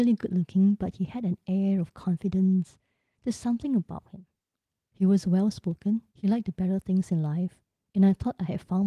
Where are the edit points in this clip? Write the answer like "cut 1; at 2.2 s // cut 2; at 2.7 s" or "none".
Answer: cut 1; at 6.1 s